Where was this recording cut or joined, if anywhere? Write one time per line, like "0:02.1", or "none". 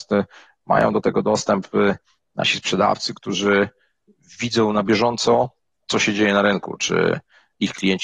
none